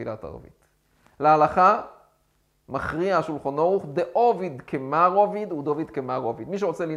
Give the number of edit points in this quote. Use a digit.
0